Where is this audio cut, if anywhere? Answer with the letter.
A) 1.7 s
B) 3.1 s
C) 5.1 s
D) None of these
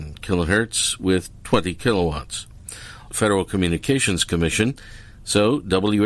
B